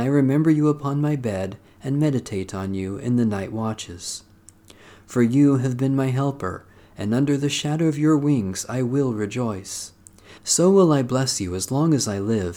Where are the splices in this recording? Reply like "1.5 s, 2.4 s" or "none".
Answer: 10.4 s